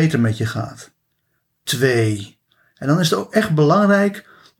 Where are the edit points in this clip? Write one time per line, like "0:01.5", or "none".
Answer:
none